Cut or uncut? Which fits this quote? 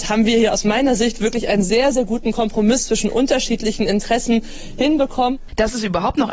uncut